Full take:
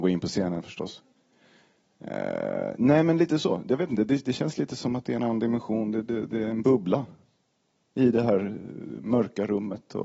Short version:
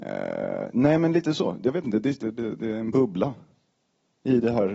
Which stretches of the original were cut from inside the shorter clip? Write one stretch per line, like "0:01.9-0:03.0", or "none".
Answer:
0:04.3-0:05.9